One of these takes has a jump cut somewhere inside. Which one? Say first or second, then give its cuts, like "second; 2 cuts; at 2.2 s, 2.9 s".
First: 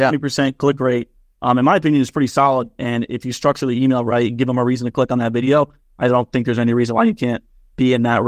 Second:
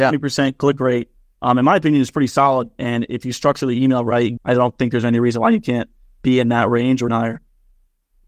second; 2 cuts; at 4.4 s, 7.1 s